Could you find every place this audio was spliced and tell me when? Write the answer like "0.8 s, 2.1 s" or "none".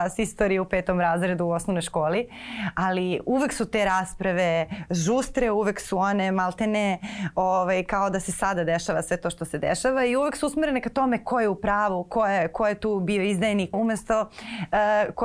13.7 s